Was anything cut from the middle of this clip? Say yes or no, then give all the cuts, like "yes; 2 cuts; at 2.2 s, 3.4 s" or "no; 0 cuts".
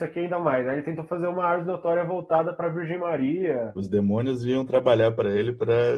yes; 1 cut; at 3.8 s